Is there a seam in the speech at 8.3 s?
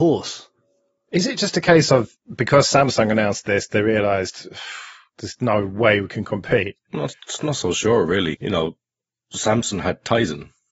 yes; 1 cut; at 8.3 s

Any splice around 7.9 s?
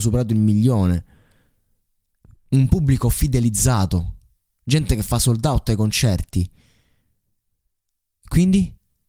no; 0 cuts

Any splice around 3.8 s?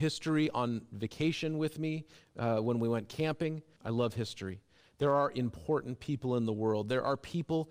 yes; 1 cut; at 3.8 s

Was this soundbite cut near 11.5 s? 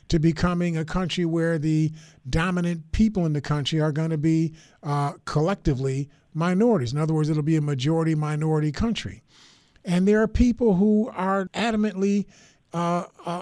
yes; 1 cut; at 11.5 s

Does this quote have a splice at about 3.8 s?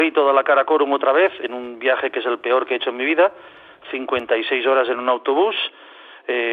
no; 0 cuts

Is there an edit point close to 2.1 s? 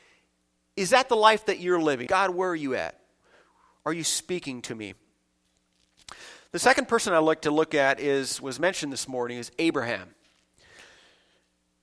yes; 1 cut; at 2.1 s

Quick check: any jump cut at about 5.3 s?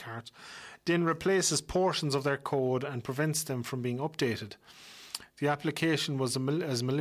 no; 0 cuts

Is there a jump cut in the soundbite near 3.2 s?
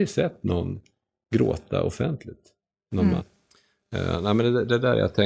yes; 1 cut; at 3.2 s

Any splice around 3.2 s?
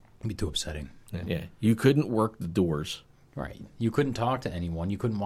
no; 1 cut; at 1.2 s

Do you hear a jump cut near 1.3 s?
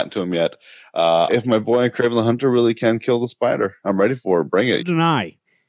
yes; 2 cuts; at 1.3 s, 4.8 s

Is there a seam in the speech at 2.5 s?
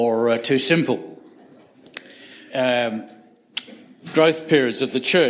yes; 1 cut; at 2.5 s

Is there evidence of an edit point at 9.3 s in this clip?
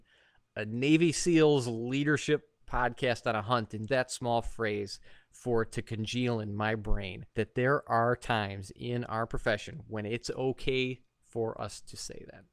no; 2 cuts; at 3.9 s, 7.3 s

